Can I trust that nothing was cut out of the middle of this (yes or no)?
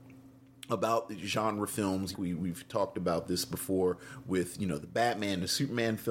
no